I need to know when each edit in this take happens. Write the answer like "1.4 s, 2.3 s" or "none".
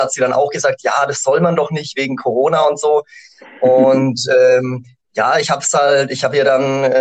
none